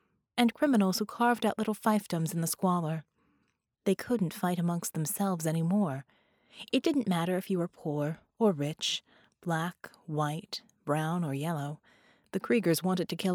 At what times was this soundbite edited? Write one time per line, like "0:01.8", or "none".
0:03.7